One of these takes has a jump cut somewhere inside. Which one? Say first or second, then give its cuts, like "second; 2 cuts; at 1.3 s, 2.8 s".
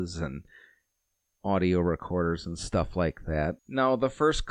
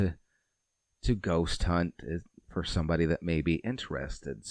first; 1 cut; at 3.6 s